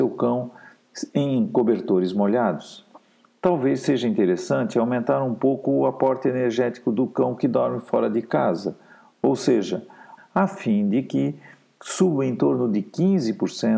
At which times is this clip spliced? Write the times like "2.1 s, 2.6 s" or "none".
10.2 s

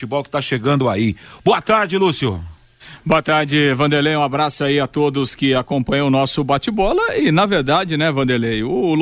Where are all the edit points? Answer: none

